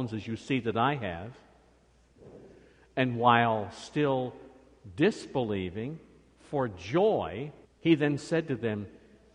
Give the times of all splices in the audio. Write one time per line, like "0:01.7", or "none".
0:07.6